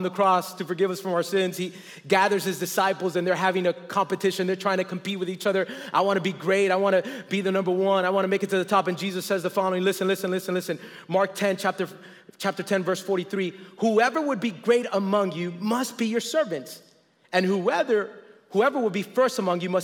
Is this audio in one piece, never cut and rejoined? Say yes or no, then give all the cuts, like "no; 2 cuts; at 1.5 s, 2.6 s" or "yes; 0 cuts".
yes; 0 cuts